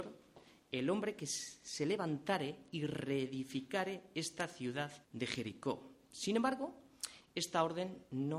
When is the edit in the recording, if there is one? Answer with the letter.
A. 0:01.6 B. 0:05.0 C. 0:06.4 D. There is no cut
B